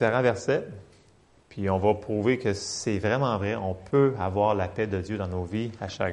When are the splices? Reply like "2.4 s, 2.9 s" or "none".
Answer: none